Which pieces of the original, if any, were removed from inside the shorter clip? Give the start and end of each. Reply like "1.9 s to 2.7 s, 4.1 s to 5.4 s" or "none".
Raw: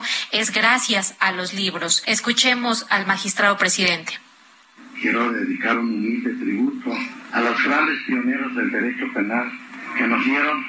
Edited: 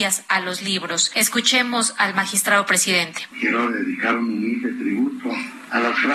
4.2 s to 4.9 s